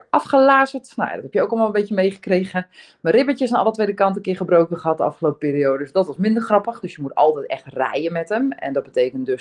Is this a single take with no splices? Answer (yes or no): no